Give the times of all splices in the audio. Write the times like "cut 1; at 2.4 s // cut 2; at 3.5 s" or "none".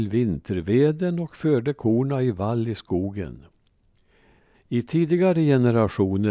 cut 1; at 4.5 s